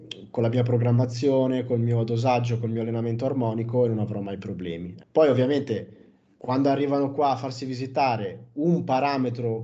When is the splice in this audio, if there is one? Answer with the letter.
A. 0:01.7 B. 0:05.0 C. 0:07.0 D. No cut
B